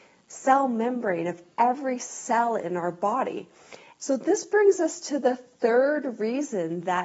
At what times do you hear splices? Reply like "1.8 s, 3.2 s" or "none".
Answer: 4.0 s